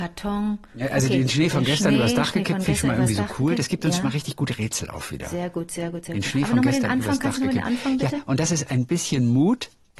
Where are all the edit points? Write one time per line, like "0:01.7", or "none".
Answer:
none